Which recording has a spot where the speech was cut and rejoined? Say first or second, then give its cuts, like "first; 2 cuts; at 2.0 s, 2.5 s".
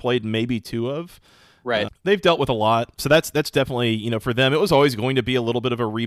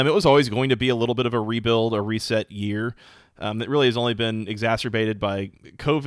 first; 2 cuts; at 1.9 s, 3.0 s